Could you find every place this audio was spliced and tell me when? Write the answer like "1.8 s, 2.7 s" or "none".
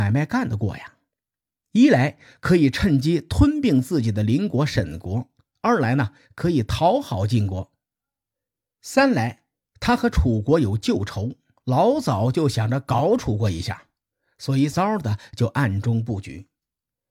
14.7 s